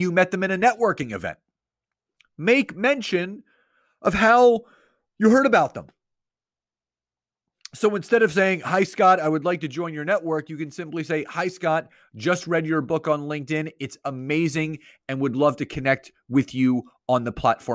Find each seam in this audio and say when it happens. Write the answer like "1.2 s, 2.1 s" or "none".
none